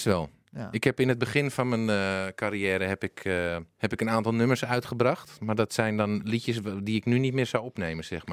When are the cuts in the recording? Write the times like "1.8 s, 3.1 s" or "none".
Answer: none